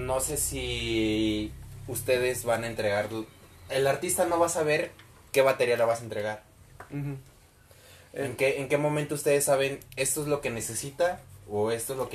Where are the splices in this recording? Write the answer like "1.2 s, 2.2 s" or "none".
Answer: none

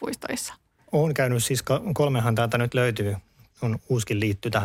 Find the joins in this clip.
3.5 s

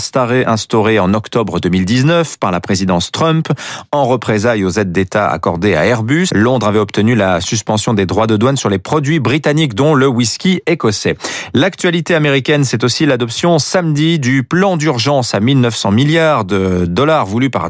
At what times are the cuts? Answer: 6.3 s

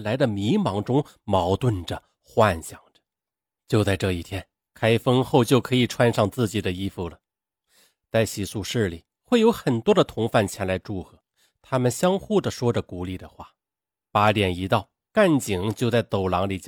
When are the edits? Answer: 3.6 s

